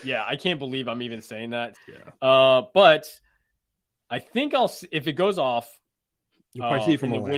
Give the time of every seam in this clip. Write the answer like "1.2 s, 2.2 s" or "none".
1.7 s, 4.9 s